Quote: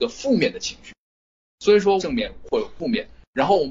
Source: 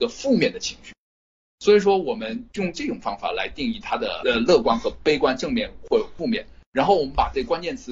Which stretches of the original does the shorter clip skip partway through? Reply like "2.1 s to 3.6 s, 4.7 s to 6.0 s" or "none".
2.0 s to 5.4 s